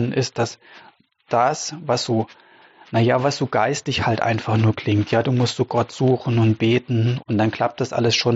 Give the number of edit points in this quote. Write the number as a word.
one